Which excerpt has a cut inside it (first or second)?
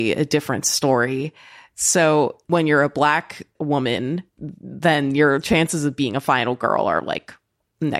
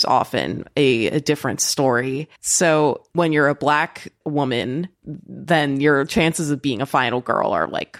second